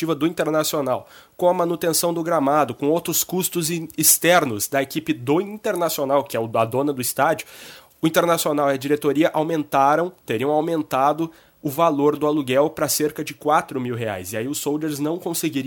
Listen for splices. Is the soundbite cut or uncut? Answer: uncut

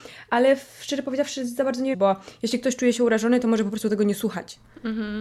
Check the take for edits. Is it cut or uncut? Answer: cut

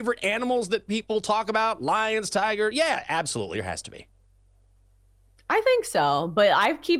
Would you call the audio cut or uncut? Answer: uncut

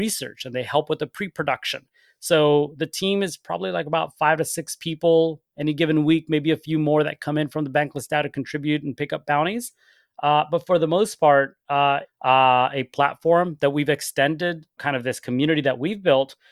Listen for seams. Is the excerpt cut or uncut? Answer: cut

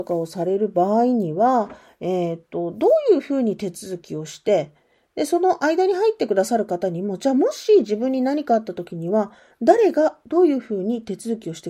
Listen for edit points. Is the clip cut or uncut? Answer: uncut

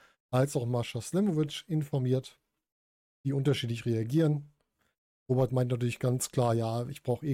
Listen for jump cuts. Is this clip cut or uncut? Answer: uncut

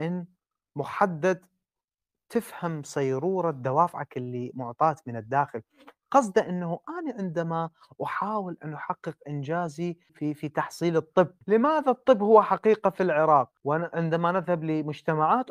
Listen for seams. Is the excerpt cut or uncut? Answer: cut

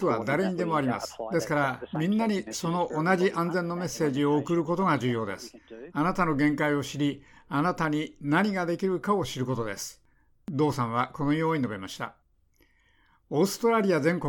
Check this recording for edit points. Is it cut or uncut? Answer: uncut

